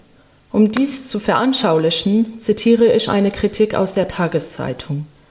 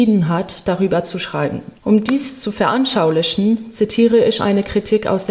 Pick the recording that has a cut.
second; 1 cut; at 1.8 s

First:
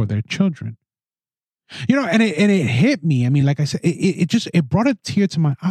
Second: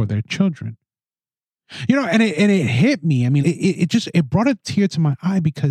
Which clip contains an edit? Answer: second; 1 cut; at 3.4 s

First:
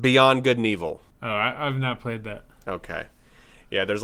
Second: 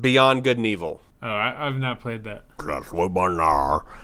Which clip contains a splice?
second; 1 cut; at 2.6 s

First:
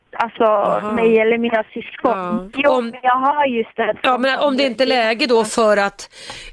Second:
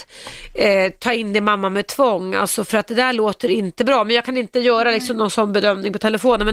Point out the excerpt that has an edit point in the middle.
first; 1 cut; at 2.5 s

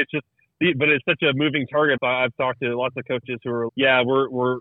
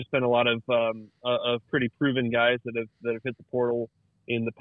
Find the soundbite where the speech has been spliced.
first; 2 cuts; at 2.0 s, 3.7 s

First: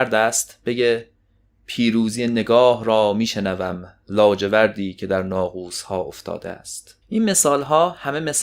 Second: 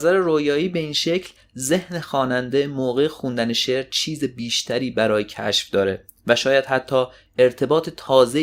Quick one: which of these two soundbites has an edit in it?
first; 1 cut; at 7.0 s

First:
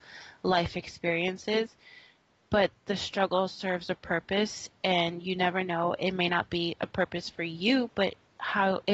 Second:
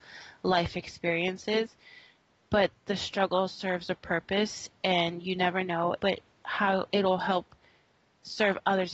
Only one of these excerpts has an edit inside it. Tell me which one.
second; 1 cut; at 6.0 s

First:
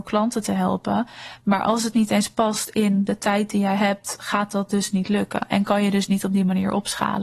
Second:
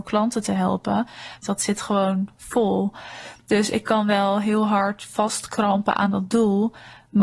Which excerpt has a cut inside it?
second; 1 cut; at 1.4 s

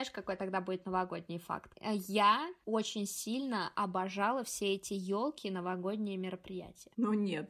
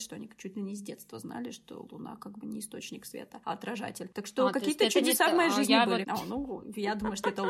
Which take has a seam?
second; 1 cut; at 6.0 s

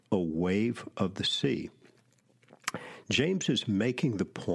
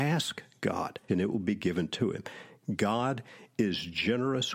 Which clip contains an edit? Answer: second; 1 cut; at 1.1 s

